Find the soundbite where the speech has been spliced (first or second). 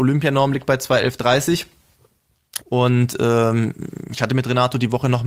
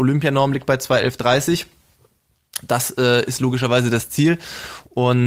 first